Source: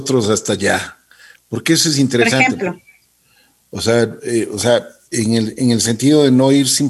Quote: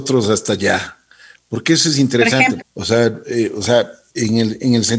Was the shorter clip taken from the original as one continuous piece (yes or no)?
no